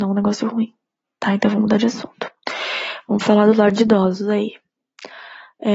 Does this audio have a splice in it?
no; 0 cuts

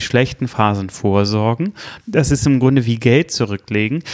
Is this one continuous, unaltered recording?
yes; 0 cuts

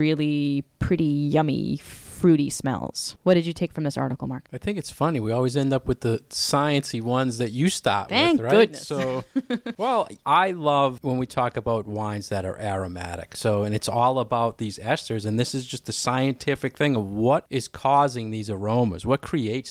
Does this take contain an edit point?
no; 0 cuts

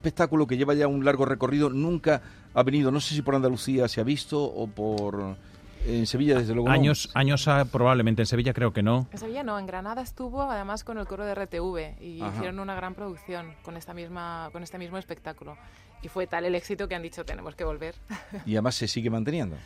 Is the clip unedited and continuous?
yes; 0 cuts

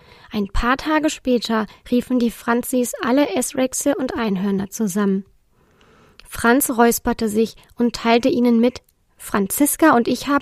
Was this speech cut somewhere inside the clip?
no; 0 cuts

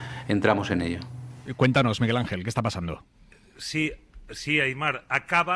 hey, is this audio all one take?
yes; 0 cuts

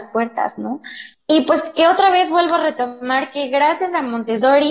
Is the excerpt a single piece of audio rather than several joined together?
no; 1 cut; at 1.1 s

